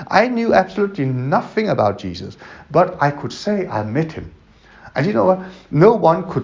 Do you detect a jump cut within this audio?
no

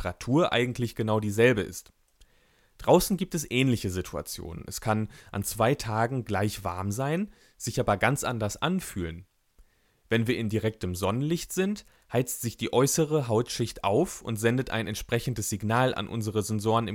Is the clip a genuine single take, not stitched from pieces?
yes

